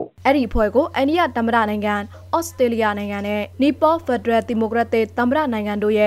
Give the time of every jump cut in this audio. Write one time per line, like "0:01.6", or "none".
none